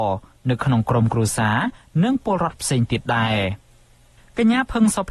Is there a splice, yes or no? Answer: no